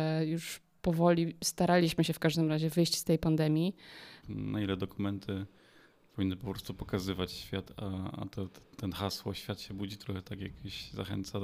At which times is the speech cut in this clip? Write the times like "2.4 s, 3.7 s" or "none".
4.2 s